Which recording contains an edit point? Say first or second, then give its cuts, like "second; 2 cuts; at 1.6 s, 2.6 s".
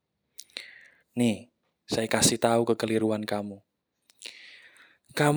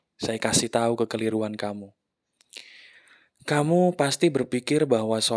first; 1 cut; at 1.0 s